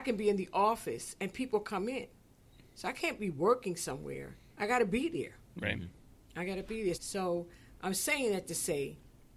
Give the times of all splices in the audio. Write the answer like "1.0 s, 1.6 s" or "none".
4.5 s, 6.9 s